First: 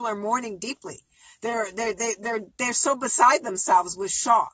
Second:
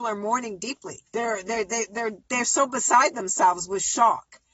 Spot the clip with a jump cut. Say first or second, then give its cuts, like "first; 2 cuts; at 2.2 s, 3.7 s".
second; 1 cut; at 1.1 s